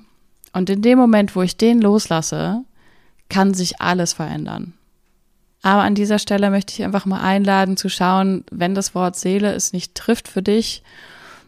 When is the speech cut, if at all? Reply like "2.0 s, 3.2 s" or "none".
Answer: 5.5 s